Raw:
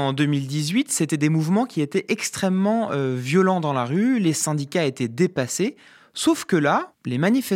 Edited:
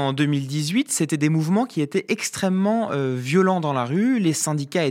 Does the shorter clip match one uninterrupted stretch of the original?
yes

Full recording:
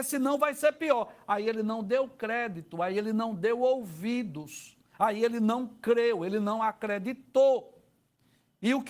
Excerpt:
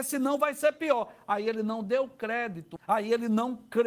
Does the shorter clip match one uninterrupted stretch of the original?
no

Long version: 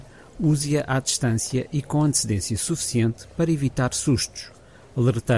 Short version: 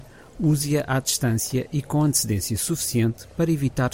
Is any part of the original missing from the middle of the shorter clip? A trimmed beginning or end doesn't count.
no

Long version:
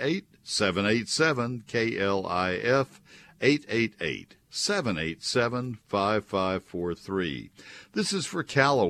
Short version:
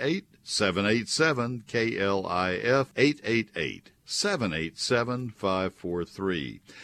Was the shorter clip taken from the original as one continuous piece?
no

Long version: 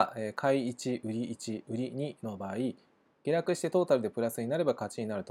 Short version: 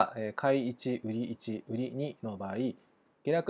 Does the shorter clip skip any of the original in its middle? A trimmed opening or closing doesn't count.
no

